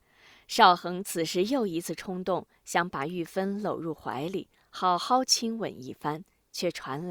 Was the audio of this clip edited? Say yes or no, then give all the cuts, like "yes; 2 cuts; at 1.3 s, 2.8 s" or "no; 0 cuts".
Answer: no; 0 cuts